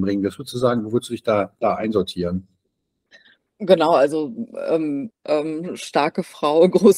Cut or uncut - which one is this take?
cut